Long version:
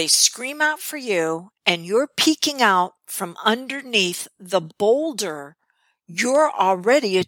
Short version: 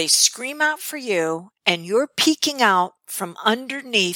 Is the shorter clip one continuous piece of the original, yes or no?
yes